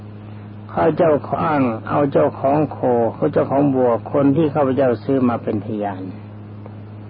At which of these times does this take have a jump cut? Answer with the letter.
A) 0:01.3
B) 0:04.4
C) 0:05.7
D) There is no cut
A